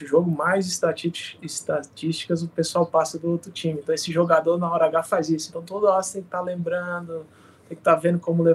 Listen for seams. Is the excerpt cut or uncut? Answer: uncut